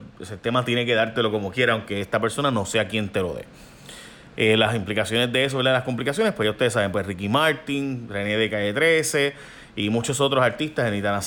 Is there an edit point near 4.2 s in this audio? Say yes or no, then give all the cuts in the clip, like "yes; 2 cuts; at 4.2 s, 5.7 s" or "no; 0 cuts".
no; 0 cuts